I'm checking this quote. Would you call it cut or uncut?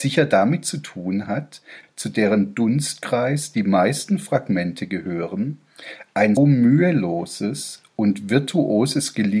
cut